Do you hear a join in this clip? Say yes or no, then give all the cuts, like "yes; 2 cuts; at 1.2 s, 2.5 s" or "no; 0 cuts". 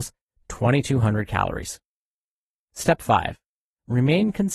no; 0 cuts